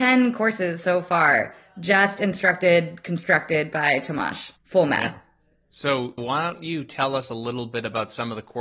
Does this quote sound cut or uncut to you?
cut